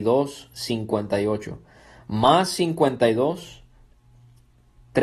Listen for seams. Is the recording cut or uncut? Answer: uncut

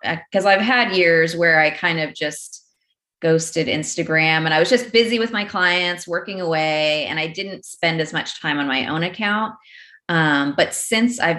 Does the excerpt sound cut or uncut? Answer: uncut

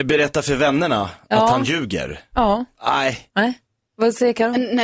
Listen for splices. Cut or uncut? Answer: cut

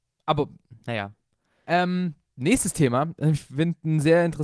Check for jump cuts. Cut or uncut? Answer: cut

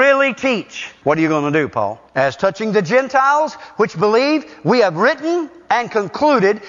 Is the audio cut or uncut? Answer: cut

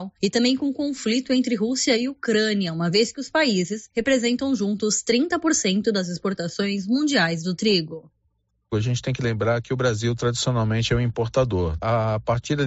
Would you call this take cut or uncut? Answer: uncut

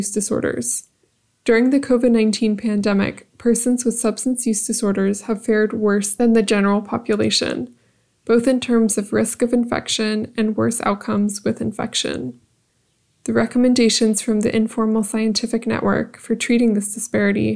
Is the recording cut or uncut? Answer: uncut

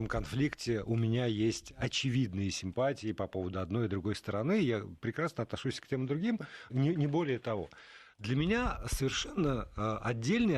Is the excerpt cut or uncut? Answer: cut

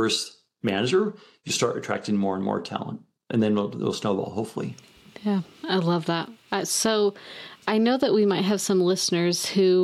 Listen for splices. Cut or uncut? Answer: uncut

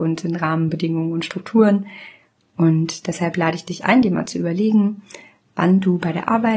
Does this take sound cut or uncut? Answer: cut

